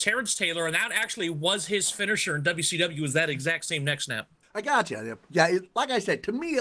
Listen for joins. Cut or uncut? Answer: uncut